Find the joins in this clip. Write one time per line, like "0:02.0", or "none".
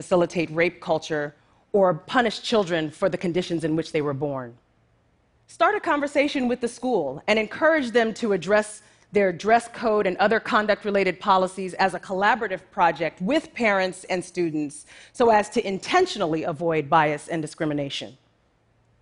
0:05.3